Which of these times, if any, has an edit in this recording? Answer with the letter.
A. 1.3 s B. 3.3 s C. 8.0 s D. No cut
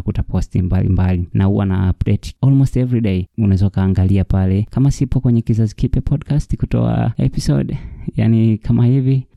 B